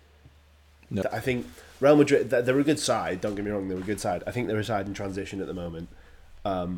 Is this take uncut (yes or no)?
no